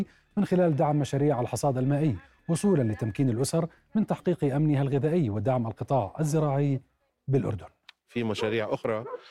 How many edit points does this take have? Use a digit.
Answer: 0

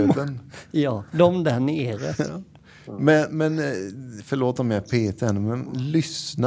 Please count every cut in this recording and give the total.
0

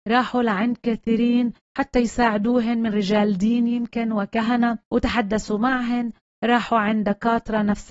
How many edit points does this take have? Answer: 1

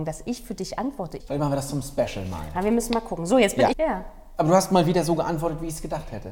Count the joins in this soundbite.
2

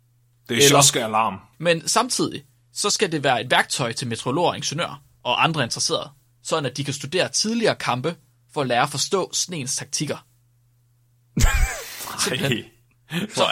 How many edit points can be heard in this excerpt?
1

